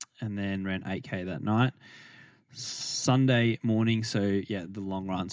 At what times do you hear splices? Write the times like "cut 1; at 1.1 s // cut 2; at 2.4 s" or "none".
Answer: none